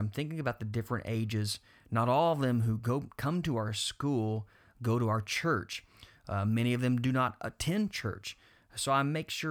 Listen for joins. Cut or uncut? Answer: uncut